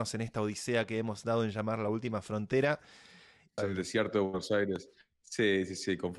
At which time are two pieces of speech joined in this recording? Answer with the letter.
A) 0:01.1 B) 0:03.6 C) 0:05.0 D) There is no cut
B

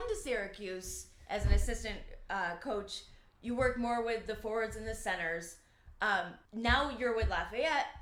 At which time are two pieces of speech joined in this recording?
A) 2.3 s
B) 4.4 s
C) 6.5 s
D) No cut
C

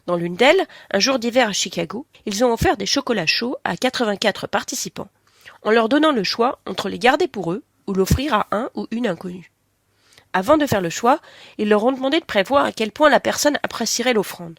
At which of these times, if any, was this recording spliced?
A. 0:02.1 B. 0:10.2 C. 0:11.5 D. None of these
A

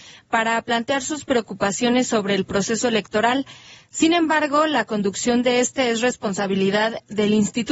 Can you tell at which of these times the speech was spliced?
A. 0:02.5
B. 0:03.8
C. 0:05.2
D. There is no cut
D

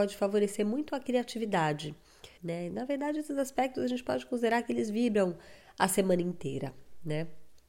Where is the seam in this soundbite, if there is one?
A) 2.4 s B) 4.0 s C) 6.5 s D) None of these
A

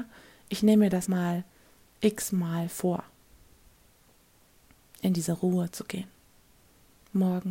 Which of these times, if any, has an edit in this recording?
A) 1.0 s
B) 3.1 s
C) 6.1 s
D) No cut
A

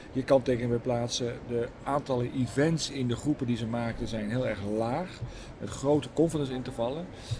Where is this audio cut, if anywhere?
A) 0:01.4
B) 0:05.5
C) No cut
B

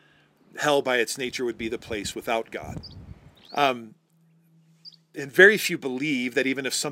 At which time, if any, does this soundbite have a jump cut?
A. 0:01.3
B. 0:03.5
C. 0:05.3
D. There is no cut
B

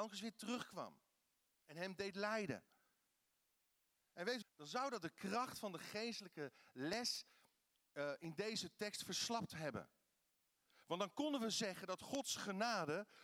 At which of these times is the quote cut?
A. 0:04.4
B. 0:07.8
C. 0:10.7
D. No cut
A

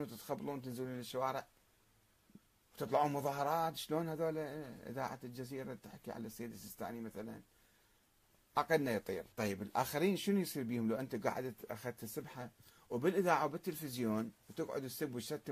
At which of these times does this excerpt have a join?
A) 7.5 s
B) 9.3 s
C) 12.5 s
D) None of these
B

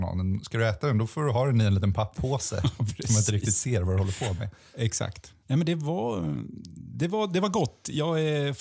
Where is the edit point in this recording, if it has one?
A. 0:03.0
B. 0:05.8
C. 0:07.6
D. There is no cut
D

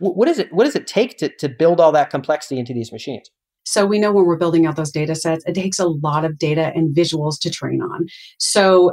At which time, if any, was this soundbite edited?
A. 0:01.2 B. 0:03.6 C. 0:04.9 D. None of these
B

